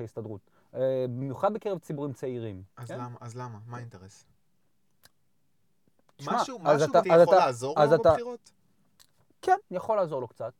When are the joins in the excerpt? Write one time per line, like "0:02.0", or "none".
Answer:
0:07.0